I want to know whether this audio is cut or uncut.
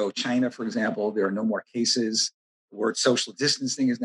cut